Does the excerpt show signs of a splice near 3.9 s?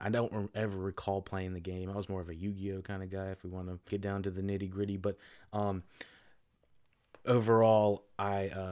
yes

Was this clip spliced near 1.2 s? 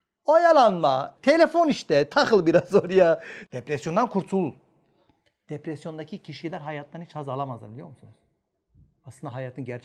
yes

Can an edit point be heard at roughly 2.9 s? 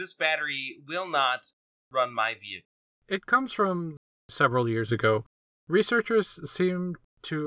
no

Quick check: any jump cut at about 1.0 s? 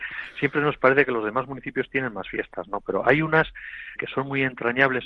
no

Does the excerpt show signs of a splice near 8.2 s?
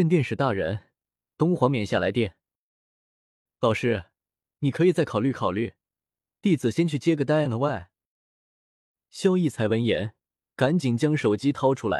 no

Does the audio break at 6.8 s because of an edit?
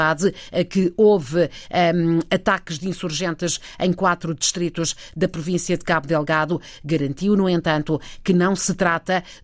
no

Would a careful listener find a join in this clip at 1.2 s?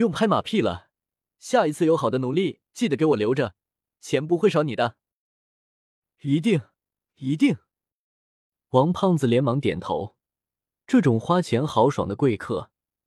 no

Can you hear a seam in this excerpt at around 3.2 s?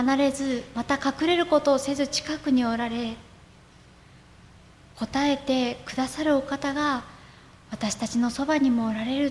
no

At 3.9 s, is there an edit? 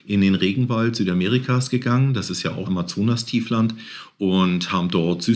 no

